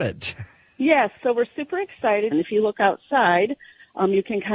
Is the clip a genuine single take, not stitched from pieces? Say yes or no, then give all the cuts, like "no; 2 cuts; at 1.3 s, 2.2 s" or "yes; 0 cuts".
no; 1 cut; at 2.3 s